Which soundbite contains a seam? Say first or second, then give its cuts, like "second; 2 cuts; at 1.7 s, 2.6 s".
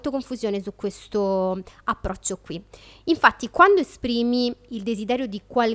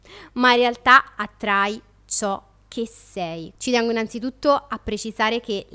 second; 1 cut; at 3.5 s